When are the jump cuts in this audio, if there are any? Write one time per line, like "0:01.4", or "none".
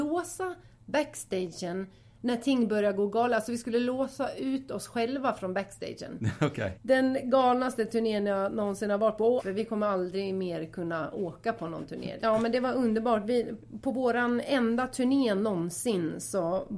0:06.7
0:09.4
0:12.2